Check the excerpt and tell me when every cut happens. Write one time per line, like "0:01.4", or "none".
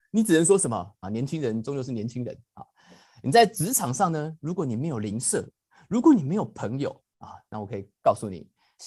0:01.0